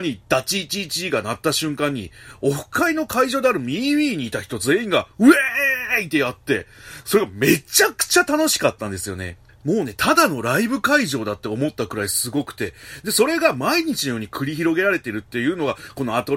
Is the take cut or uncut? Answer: uncut